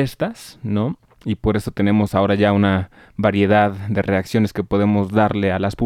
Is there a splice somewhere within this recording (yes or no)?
no